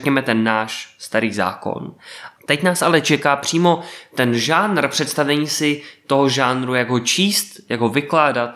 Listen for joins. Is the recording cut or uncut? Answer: cut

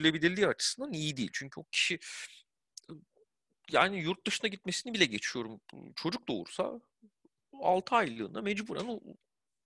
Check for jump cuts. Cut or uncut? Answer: uncut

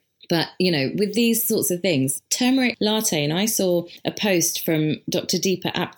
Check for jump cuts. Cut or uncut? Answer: uncut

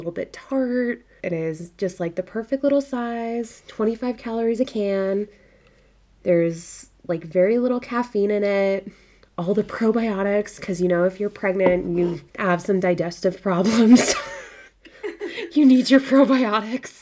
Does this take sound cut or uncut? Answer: cut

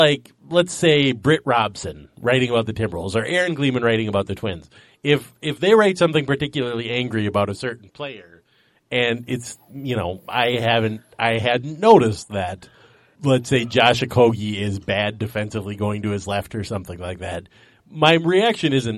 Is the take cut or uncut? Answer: cut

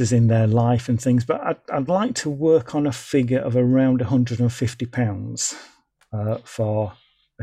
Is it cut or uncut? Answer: uncut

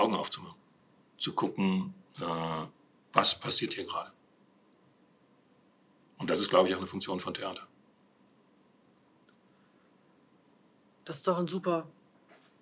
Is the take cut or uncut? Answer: uncut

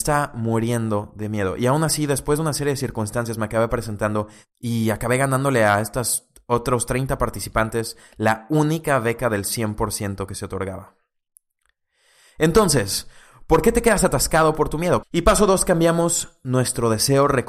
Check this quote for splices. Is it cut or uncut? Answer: cut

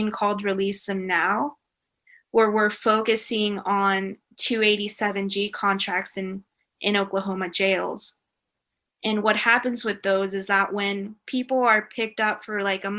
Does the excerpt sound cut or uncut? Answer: uncut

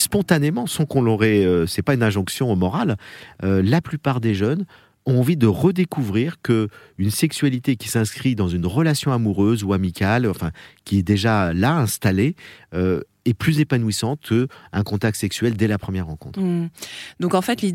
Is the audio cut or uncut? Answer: uncut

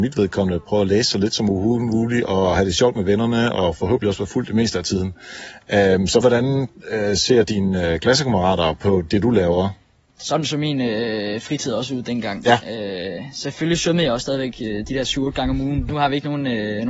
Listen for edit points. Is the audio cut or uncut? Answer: cut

